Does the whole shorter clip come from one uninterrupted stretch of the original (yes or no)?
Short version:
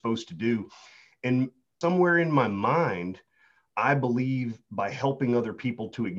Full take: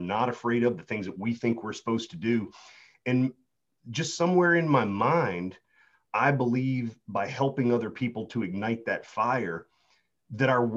no